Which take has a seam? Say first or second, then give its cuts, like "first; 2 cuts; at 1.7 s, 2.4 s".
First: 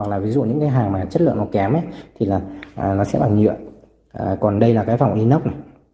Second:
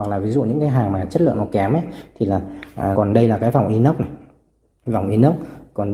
second; 1 cut; at 2.9 s